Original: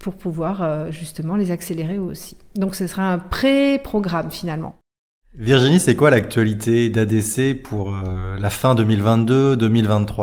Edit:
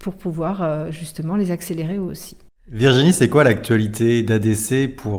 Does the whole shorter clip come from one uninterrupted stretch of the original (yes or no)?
no